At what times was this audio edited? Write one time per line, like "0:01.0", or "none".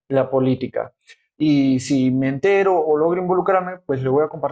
0:01.3